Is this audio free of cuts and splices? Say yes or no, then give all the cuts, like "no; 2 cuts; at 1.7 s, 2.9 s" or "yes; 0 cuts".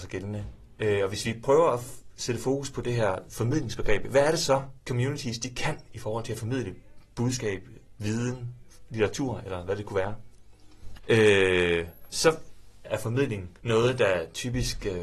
no; 3 cuts; at 10.9 s, 12.1 s, 13.6 s